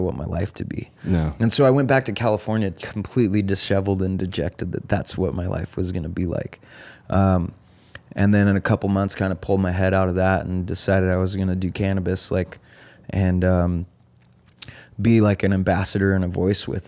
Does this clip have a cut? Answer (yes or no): no